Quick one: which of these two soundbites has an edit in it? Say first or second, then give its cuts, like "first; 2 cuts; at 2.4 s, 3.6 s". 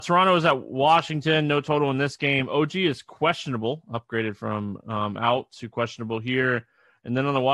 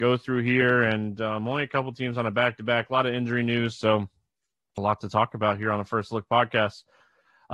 second; 1 cut; at 4.8 s